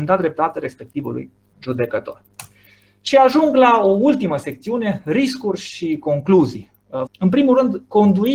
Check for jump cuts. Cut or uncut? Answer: cut